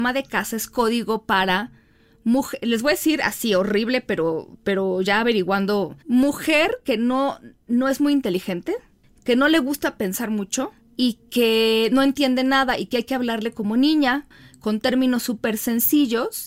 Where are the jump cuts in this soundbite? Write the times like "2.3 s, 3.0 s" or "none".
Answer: 6.0 s